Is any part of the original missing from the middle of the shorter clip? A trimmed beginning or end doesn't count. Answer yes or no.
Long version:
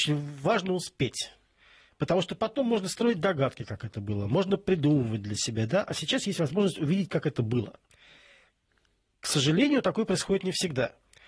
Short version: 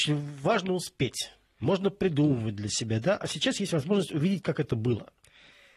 yes